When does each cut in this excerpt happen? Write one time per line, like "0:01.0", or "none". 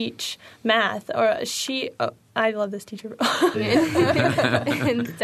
0:03.5